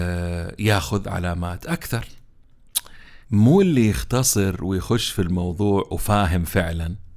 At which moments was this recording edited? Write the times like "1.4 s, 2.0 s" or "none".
3.2 s